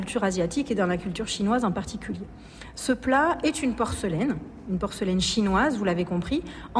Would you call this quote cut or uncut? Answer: uncut